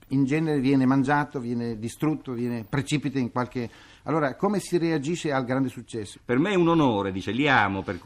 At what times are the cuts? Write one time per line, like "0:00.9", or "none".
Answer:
0:06.1